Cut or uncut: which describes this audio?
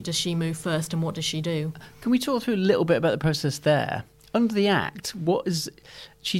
uncut